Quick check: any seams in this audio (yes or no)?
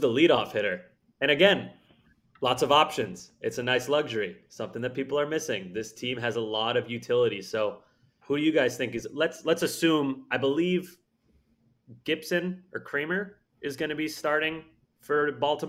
yes